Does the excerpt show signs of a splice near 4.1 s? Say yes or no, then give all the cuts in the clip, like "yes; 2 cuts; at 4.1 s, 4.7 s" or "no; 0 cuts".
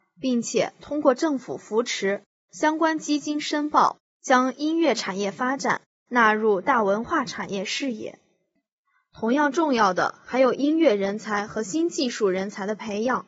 yes; 1 cut; at 4.1 s